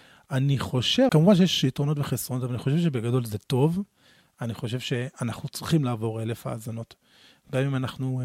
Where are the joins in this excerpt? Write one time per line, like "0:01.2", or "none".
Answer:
0:01.1